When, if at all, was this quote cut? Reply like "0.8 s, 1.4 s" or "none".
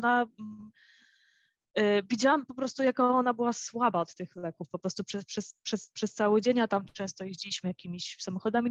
none

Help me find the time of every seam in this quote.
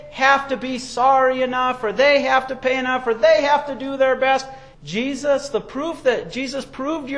4.7 s

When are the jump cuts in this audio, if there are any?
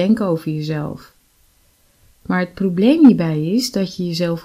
none

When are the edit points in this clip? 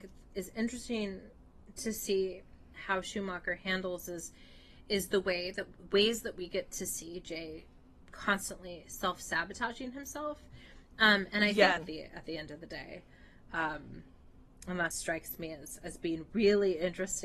11.8 s, 14.9 s

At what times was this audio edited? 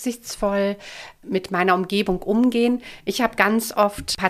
none

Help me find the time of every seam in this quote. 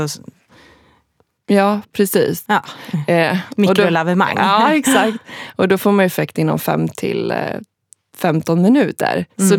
2.4 s

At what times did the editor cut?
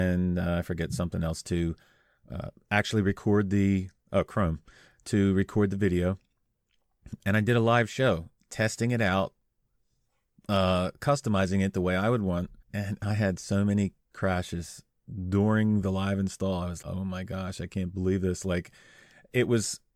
12.6 s, 16.8 s

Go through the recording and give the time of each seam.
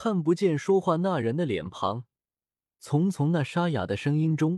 none

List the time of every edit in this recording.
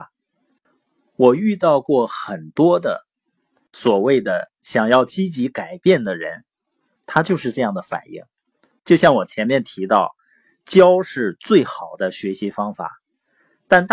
7.0 s, 8.7 s

